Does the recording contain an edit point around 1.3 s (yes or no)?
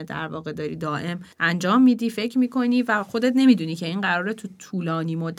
yes